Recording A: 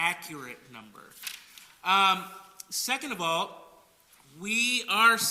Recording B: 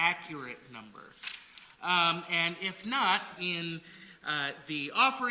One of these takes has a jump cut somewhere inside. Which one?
B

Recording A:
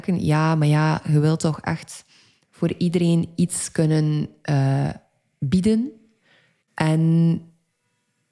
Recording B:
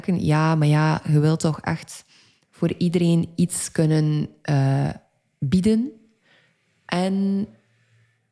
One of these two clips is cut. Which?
A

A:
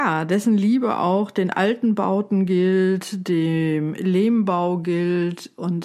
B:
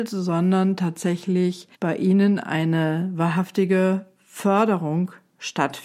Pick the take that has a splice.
B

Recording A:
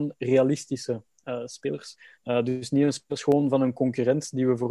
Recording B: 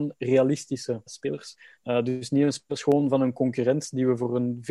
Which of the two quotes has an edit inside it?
B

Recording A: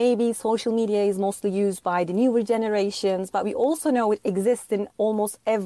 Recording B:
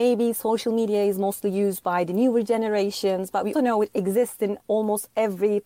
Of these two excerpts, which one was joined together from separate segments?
B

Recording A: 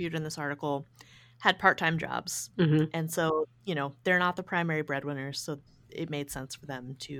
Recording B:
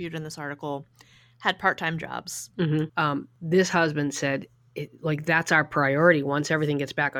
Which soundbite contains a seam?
B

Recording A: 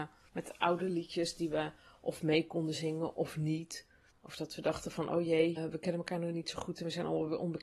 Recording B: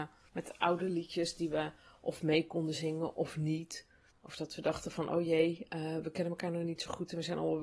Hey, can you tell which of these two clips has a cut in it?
A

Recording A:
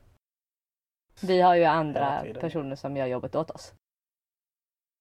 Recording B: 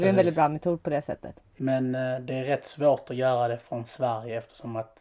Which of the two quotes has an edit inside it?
A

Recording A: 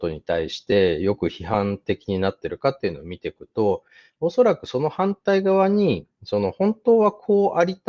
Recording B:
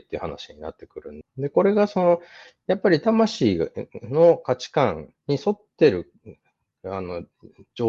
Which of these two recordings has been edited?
B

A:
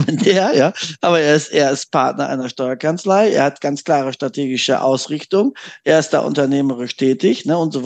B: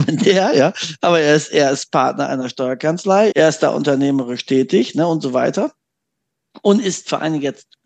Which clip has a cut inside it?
B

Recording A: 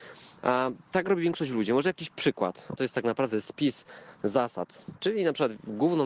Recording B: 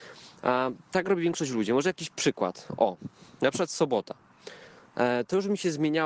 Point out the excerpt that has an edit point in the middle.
A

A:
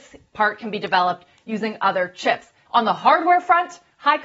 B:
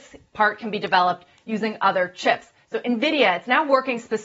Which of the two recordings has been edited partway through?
A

